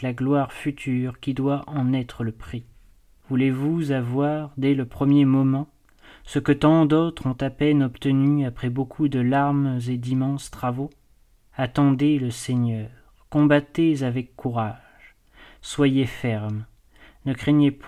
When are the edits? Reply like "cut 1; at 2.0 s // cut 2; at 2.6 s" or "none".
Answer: none